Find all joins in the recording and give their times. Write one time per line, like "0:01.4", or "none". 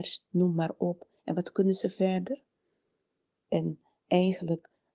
0:01.2
0:03.4